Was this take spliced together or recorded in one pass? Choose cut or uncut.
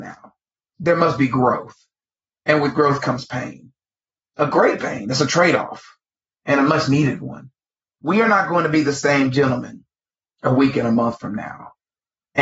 uncut